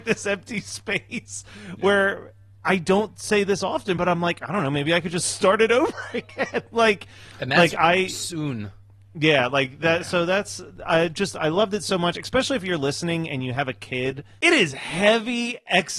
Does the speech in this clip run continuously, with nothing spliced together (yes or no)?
yes